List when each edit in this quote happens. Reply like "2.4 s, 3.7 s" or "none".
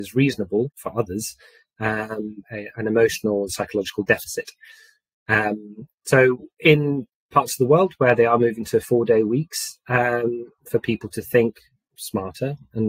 2.4 s, 10.6 s